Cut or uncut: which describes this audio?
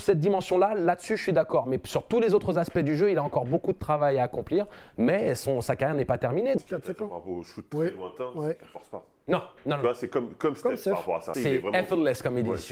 cut